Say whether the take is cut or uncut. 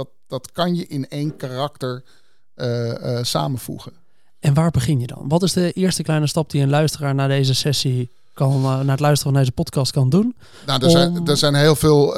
uncut